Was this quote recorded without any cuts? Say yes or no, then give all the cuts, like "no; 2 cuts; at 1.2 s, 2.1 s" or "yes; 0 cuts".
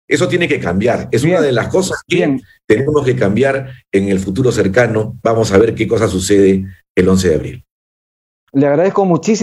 yes; 0 cuts